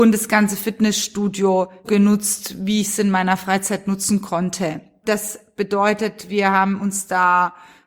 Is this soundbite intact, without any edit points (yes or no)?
no